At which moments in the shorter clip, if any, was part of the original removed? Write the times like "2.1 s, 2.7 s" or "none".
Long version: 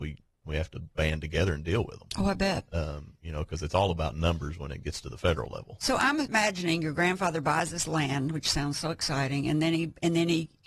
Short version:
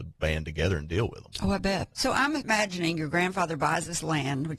1.9 s